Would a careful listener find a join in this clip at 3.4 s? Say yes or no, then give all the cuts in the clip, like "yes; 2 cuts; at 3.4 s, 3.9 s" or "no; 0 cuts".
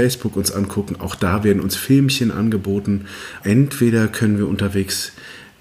yes; 1 cut; at 3.4 s